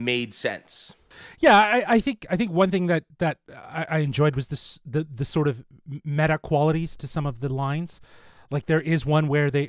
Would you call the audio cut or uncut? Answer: uncut